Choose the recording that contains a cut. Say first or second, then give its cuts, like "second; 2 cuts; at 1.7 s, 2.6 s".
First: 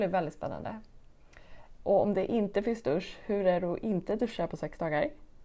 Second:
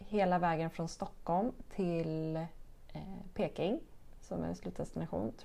first; 1 cut; at 1.8 s